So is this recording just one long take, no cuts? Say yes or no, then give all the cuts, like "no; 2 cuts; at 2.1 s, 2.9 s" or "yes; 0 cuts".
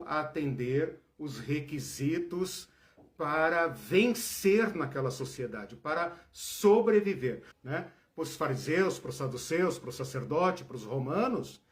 no; 1 cut; at 7.5 s